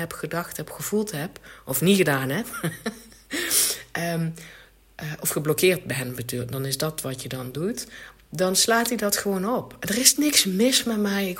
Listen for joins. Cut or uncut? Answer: uncut